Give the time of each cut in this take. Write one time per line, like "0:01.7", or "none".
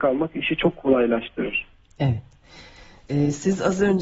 none

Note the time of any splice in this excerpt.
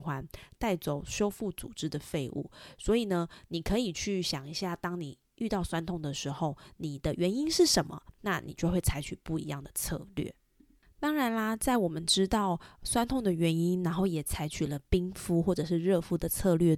none

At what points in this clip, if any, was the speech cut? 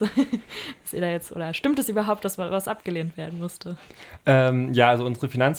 none

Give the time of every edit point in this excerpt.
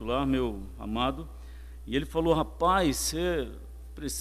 none

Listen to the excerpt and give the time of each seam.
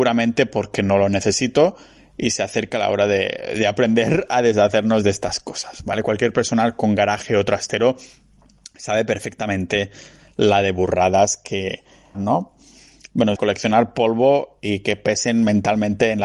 0:12.1
0:13.4

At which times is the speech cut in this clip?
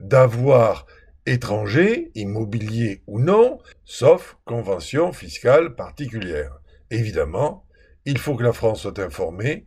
0:03.7

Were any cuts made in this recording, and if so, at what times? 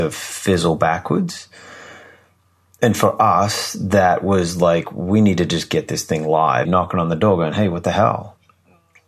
0:06.7

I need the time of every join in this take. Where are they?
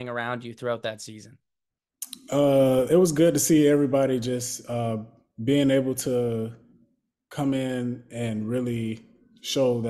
none

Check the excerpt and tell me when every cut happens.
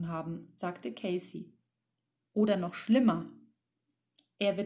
0:02.3

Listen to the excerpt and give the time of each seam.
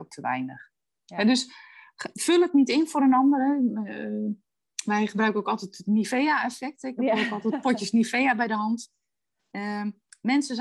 none

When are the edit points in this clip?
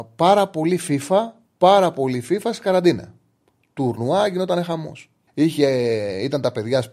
0:05.3

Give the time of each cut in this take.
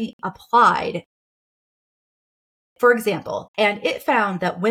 0:03.5

